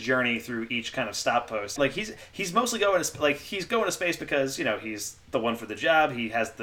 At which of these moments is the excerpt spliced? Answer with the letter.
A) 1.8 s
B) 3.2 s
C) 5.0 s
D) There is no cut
A